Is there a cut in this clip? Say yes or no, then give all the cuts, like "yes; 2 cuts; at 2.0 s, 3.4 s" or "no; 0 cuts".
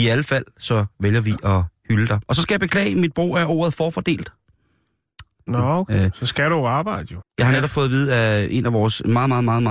yes; 2 cuts; at 5.5 s, 7.2 s